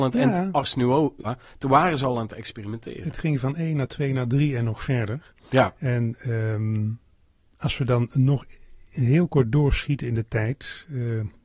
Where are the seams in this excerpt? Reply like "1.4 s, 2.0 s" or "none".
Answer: 1.2 s